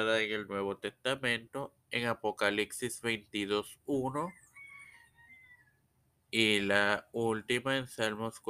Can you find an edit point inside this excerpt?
no; 0 cuts

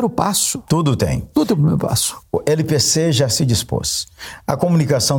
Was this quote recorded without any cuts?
no; 1 cut; at 2.2 s

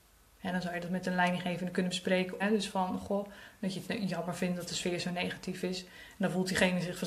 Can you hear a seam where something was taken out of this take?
yes; 1 cut; at 2.4 s

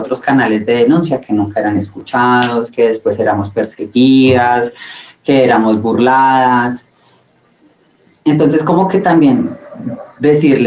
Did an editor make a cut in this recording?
no; 0 cuts

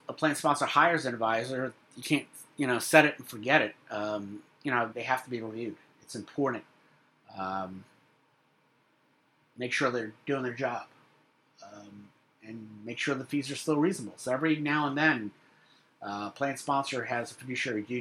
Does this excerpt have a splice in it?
yes; 1 cut; at 4.9 s

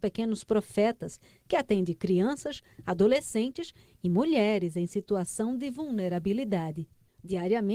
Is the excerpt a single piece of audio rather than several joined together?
yes; 0 cuts

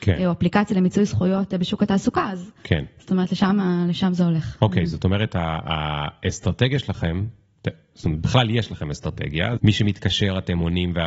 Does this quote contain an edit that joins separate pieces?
yes; 1 cut; at 9.6 s

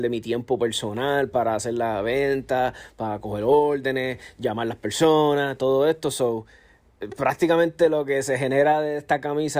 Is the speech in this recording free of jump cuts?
yes; 0 cuts

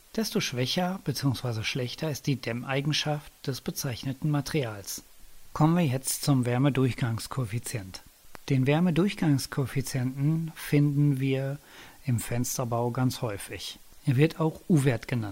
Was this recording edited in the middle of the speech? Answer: no; 0 cuts

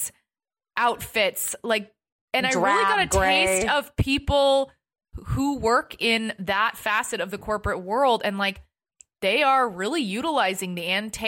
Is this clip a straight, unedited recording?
yes; 0 cuts

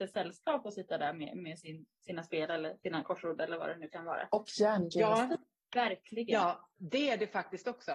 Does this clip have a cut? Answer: no; 0 cuts

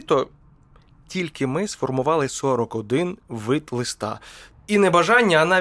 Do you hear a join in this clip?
yes; 1 cut; at 4.5 s

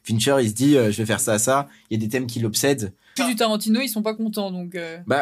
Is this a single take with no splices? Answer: no; 2 cuts; at 1.2 s, 3.2 s

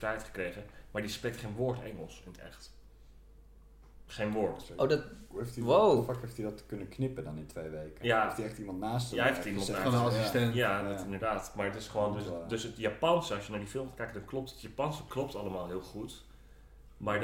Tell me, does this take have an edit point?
no; 0 cuts

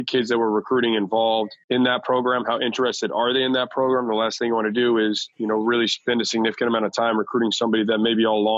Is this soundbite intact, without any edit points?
yes; 0 cuts

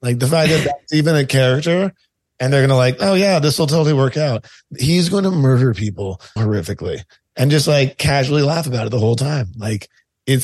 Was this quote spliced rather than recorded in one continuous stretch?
yes; 1 cut; at 6.4 s

